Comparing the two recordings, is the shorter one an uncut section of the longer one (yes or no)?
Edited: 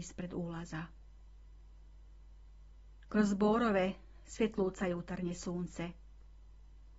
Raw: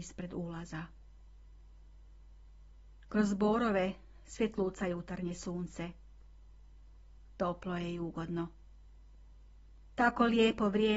yes